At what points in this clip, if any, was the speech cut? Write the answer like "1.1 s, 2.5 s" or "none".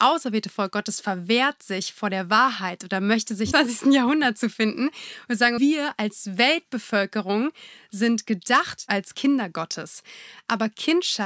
3.5 s, 5.6 s